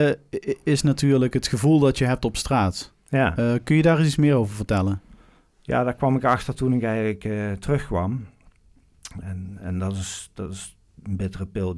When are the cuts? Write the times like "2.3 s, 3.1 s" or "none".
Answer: 9.2 s

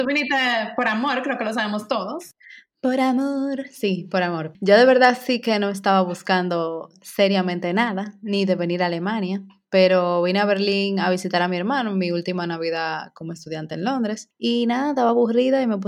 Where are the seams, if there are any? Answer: none

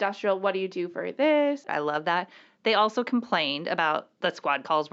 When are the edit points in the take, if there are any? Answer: 1.7 s

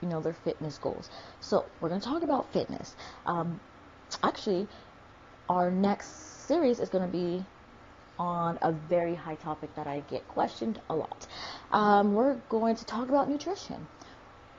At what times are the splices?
none

